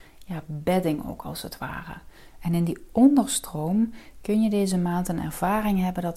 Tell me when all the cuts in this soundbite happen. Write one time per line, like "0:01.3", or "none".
0:02.4